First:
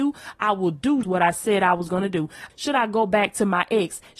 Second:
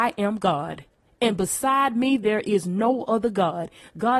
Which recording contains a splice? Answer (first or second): first